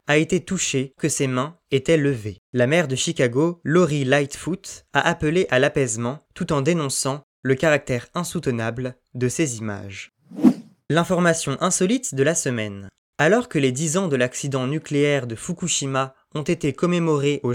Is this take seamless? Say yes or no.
no